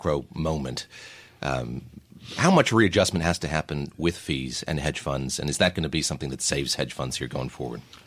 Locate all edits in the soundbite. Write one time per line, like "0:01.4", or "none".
none